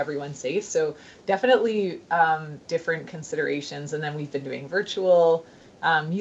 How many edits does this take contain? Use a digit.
0